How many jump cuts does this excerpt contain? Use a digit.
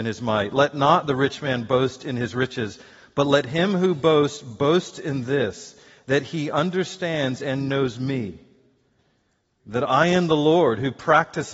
0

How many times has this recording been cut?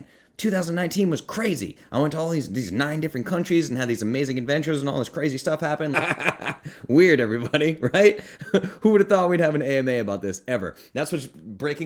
1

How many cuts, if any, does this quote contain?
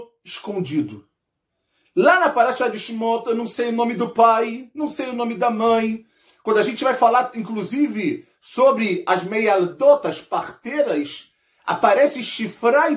0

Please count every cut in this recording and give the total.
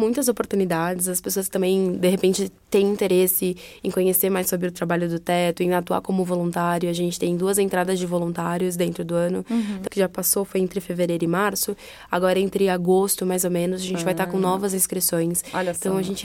1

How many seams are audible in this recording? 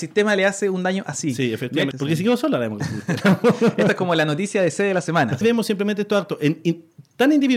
2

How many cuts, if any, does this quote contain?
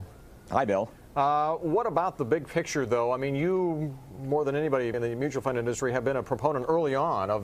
1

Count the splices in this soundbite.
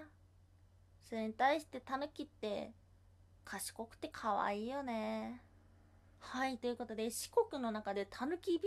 0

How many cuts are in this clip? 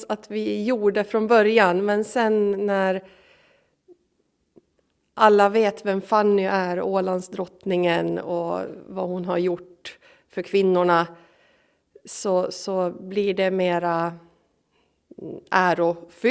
0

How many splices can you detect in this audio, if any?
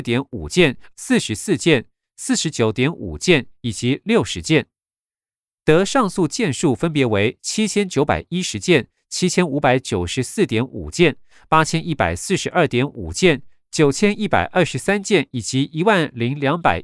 1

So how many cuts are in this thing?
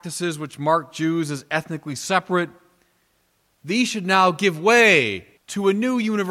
1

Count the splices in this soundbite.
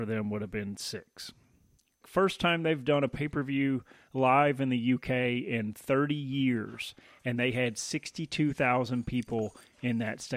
1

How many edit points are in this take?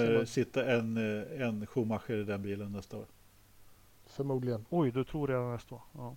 0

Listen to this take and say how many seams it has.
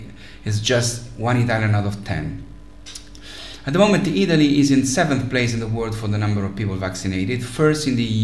0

